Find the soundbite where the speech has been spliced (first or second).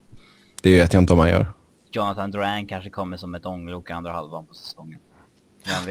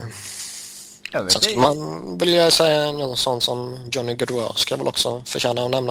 first